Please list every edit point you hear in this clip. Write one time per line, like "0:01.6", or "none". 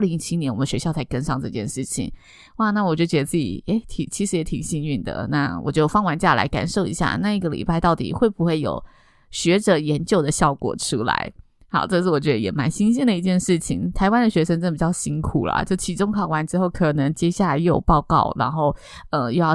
none